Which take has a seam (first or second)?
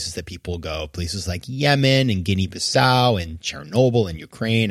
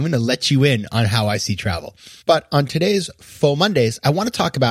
second